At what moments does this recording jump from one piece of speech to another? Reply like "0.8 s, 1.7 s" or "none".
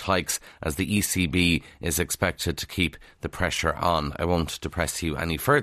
none